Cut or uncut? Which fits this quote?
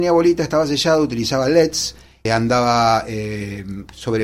cut